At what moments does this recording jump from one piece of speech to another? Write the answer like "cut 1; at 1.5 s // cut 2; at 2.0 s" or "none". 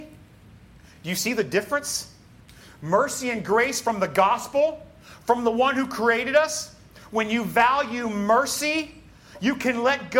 none